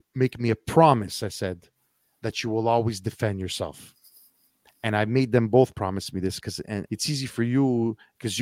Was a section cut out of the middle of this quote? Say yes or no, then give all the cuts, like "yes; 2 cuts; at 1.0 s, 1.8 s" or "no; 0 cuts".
yes; 1 cut; at 6.9 s